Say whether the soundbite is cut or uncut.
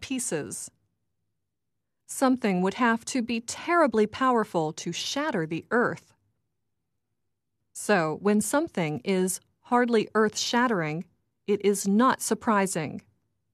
uncut